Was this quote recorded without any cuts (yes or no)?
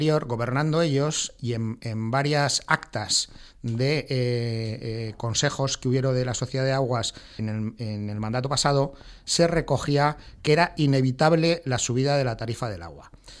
no